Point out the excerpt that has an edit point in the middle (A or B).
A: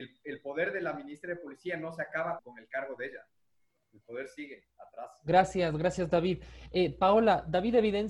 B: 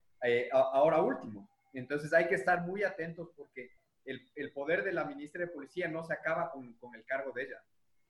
A